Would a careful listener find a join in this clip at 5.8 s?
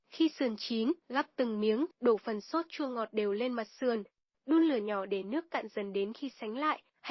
no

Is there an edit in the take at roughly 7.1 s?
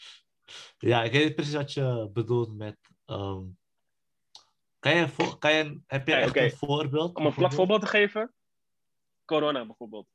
no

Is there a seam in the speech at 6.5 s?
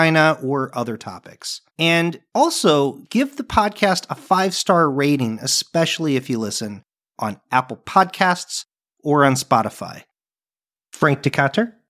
no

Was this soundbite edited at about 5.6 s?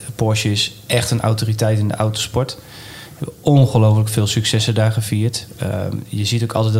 no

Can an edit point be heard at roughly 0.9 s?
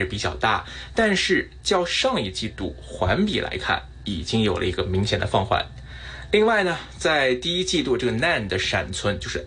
no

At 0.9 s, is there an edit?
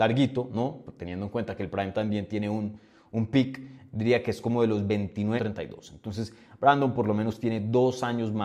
no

